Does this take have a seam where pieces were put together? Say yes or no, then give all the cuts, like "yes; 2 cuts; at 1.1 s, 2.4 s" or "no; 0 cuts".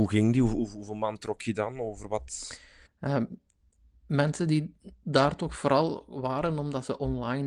yes; 1 cut; at 2.9 s